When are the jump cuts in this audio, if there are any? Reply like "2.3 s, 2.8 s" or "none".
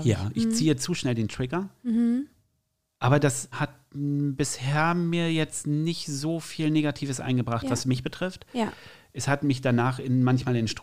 none